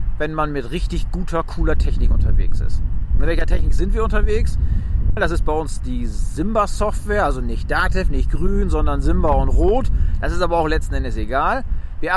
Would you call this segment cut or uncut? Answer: cut